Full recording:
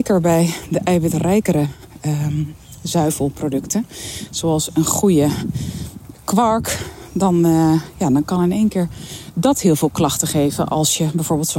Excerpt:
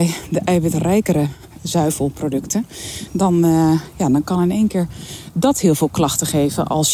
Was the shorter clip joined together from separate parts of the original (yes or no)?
yes